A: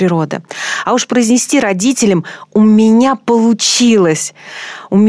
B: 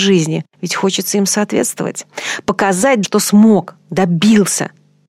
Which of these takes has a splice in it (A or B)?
B